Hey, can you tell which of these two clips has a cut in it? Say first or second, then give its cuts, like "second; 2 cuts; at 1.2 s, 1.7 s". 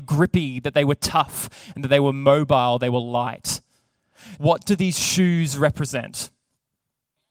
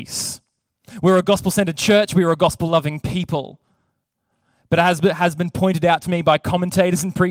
first; 1 cut; at 4.4 s